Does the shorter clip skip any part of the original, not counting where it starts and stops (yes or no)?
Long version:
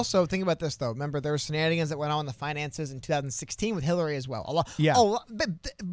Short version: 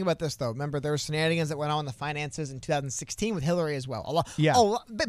no